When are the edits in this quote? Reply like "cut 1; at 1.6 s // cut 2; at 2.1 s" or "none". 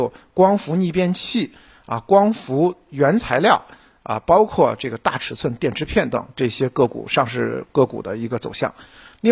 cut 1; at 6.1 s

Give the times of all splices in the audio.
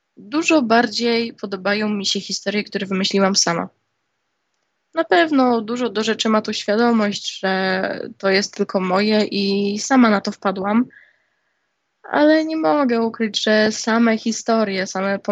none

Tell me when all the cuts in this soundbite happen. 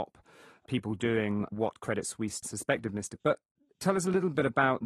cut 1; at 3.2 s

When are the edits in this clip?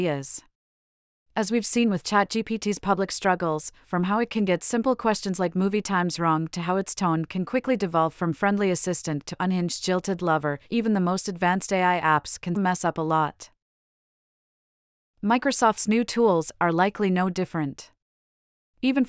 cut 1; at 12.5 s

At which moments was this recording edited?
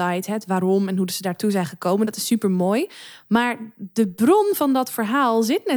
none

